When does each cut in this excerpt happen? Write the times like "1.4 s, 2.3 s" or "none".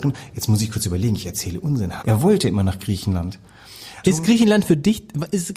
2.0 s, 4.0 s